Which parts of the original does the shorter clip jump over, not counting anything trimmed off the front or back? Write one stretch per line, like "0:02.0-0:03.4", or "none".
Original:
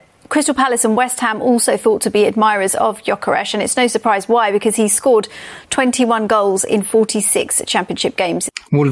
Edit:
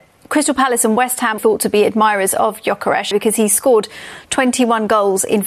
0:01.4-0:01.8
0:03.5-0:04.5